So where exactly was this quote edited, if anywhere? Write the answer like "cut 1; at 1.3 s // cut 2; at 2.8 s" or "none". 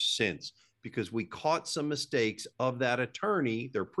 none